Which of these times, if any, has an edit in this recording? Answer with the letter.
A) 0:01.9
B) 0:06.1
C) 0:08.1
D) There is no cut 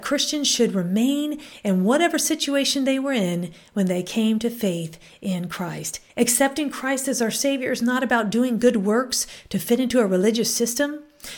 B